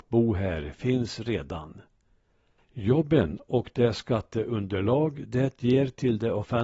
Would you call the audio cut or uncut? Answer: cut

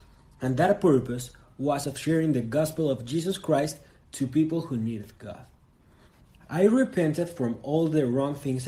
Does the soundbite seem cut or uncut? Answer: uncut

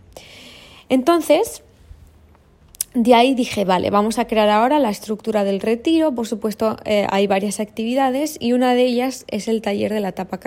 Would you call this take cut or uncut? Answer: uncut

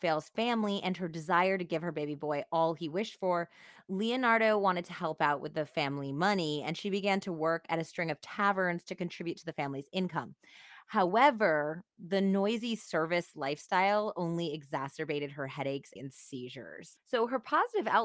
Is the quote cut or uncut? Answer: cut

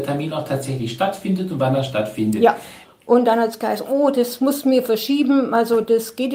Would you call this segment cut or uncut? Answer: cut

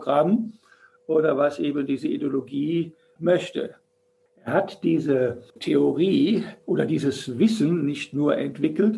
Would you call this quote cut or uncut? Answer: cut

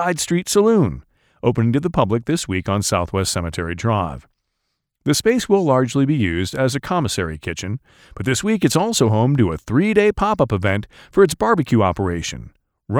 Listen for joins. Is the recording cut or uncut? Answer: uncut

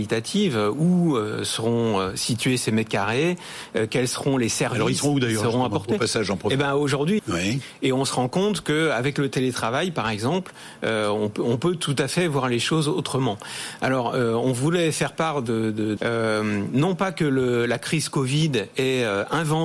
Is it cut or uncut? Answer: cut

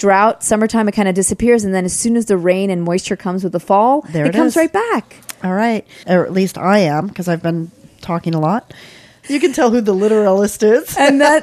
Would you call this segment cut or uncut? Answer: cut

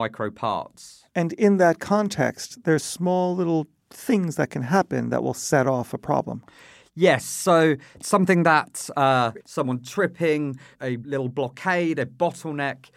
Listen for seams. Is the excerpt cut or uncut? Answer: cut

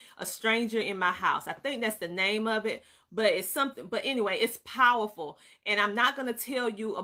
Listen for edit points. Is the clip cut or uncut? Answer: uncut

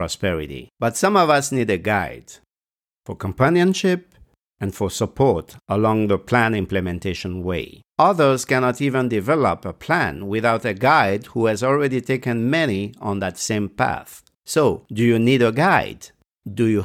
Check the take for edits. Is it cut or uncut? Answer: cut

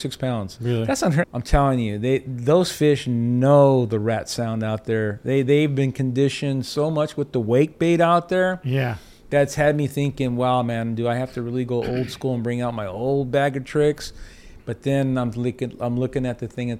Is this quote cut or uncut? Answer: cut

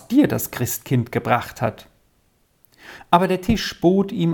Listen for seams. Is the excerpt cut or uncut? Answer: cut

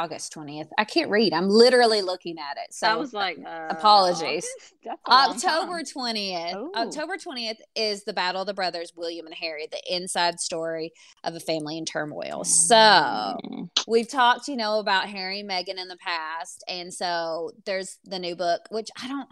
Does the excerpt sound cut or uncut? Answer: uncut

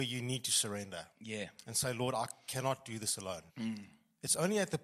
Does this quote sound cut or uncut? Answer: cut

